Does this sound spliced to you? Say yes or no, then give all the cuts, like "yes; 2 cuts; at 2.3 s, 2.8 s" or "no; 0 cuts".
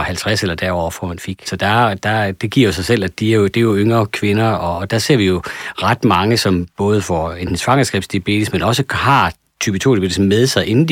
yes; 1 cut; at 1.5 s